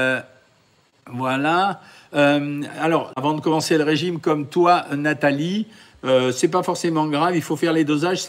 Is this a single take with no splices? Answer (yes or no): no